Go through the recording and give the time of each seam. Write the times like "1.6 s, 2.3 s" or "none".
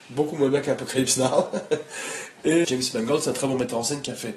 2.6 s